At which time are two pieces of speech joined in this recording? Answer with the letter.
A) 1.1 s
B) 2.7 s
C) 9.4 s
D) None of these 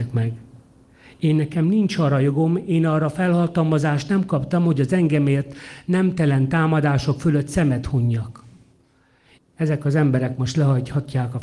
C